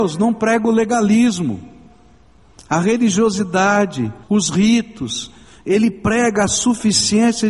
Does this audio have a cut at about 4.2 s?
yes; 1 cut; at 4.2 s

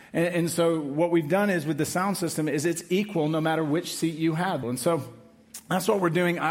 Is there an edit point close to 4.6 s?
yes; 1 cut; at 4.6 s

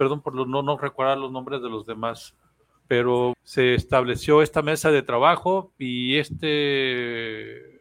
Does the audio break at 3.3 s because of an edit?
yes; 1 cut; at 3.3 s

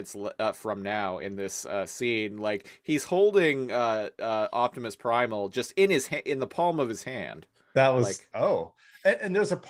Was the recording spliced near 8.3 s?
yes; 1 cut; at 8.3 s

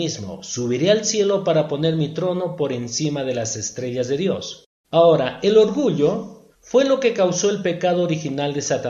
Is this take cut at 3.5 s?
no; 2 cuts; at 4.8 s, 6.5 s

